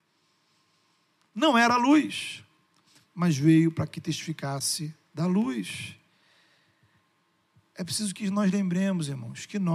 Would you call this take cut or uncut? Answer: uncut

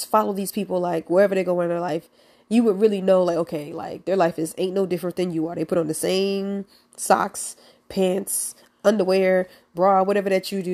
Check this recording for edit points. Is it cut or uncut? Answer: uncut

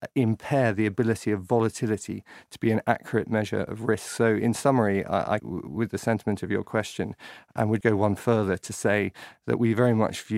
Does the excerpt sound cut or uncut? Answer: cut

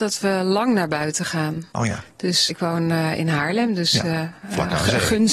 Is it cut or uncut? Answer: cut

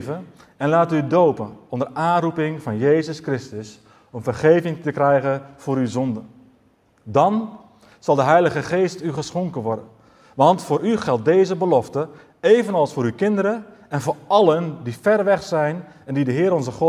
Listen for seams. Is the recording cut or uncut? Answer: uncut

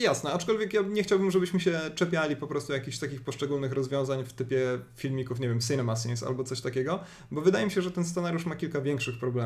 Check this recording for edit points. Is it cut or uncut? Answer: uncut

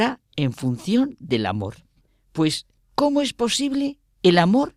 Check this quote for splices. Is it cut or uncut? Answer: uncut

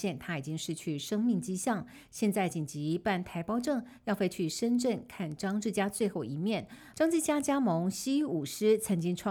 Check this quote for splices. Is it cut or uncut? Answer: cut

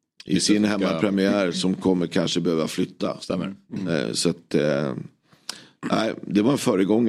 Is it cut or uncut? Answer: uncut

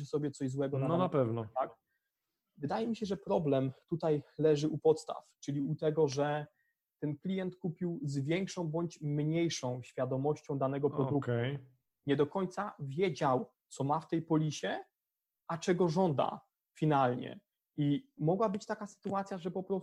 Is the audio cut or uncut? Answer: cut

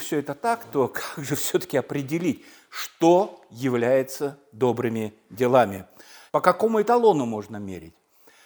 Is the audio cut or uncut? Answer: cut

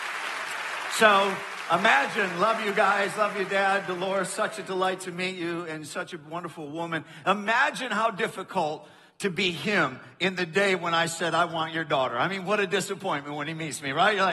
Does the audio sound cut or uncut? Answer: uncut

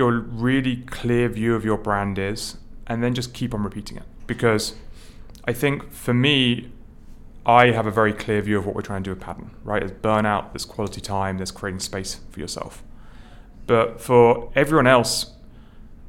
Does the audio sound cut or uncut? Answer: cut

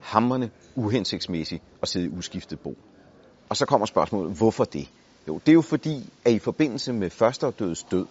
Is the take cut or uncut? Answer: uncut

